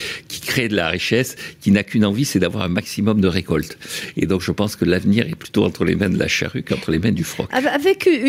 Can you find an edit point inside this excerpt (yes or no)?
no